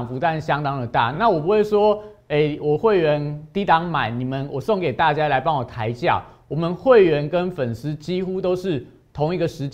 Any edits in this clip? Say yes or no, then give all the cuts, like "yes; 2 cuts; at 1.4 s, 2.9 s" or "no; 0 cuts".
no; 0 cuts